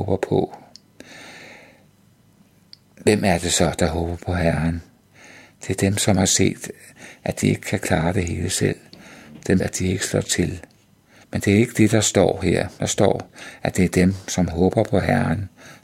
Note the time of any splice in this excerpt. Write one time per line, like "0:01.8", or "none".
0:09.6
0:11.2